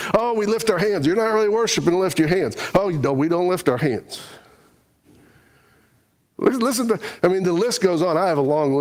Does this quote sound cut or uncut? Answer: uncut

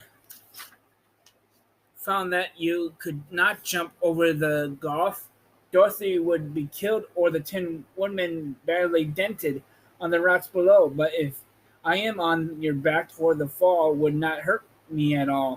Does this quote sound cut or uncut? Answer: cut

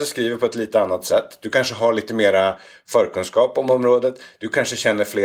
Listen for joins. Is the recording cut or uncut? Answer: uncut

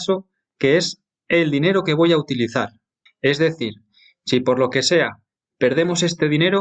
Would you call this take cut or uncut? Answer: cut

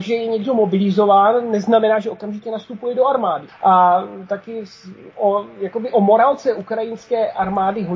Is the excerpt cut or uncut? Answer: cut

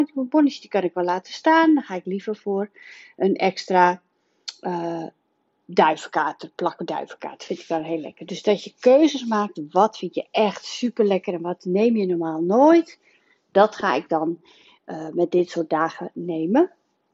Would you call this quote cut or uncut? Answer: uncut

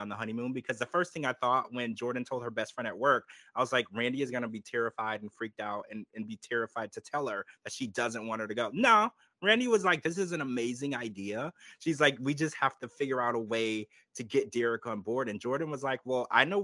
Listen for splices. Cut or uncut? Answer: uncut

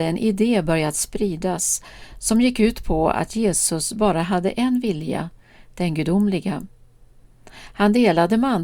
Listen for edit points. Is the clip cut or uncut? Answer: uncut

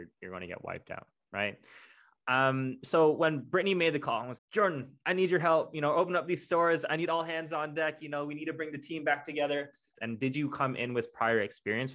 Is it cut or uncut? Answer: cut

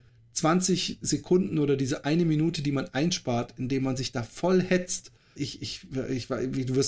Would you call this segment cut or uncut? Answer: cut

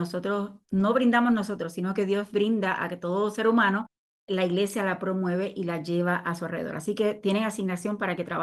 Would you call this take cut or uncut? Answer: uncut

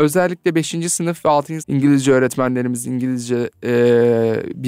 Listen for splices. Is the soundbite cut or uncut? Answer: cut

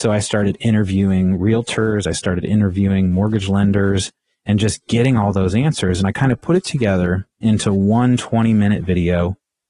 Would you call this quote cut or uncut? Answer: uncut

